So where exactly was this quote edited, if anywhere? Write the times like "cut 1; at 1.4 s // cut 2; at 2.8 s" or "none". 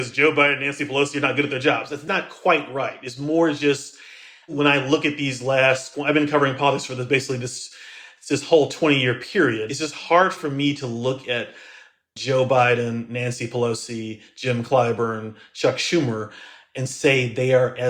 cut 1; at 9.7 s